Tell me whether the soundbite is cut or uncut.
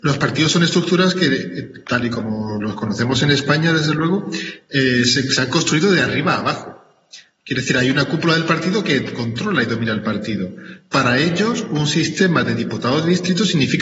uncut